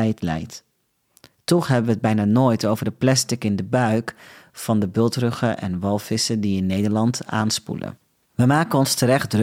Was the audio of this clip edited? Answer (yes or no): no